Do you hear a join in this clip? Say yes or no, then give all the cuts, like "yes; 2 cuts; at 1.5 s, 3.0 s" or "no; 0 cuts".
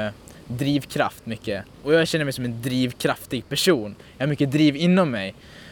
yes; 1 cut; at 1.7 s